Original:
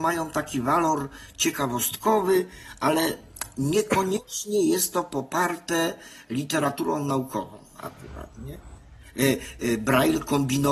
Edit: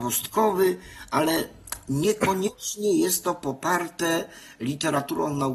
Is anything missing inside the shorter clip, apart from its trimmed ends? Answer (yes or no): no